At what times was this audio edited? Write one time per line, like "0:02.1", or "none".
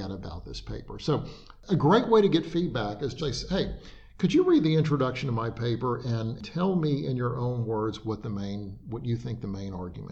0:03.2